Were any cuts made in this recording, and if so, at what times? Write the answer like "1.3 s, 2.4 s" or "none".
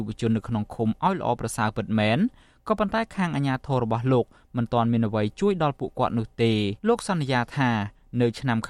6.8 s